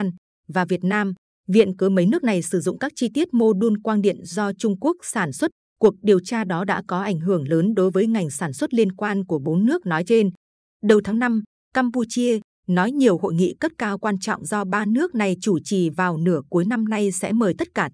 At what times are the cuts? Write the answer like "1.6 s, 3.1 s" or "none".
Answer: 12.6 s